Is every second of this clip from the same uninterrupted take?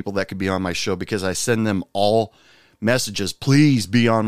yes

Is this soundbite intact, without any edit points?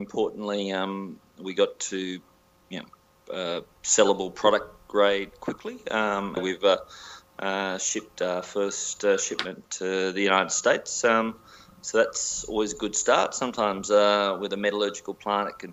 no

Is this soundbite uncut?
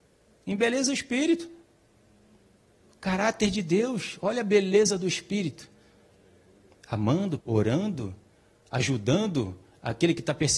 no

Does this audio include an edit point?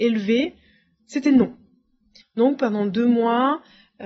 yes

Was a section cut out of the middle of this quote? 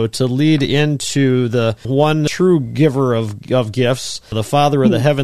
no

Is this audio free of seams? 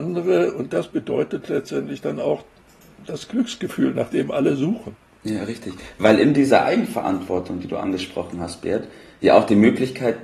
yes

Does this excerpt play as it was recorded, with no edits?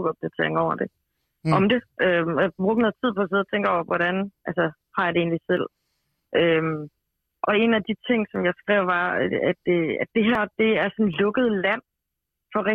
yes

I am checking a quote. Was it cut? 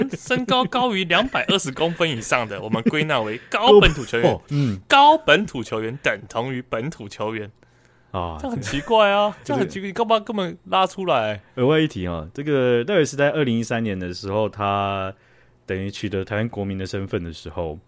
yes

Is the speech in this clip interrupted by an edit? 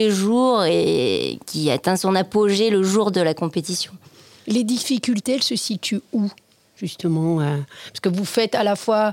yes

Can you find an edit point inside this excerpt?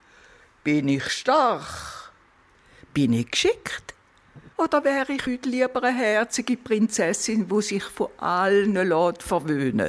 yes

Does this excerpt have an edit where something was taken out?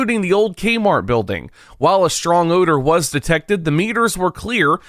no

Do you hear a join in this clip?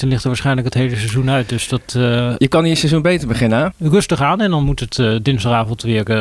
yes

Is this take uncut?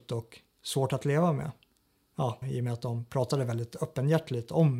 no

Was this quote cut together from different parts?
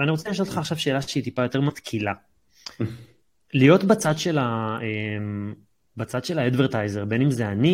no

